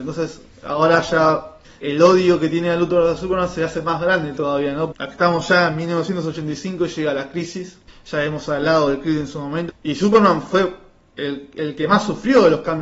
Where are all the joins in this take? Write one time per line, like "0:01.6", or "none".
0:01.8
0:04.9
0:09.7